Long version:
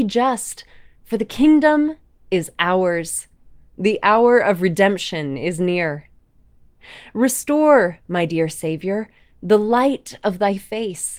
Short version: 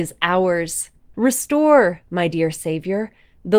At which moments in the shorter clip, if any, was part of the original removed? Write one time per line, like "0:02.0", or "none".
0:01.1